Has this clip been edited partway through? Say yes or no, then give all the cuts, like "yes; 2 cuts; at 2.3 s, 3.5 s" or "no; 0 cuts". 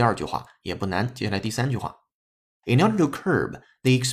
no; 0 cuts